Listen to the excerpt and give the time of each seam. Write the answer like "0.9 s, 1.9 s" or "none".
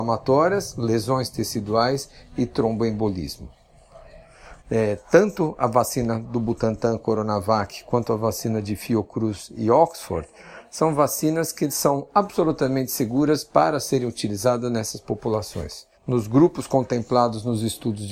4.6 s, 15.9 s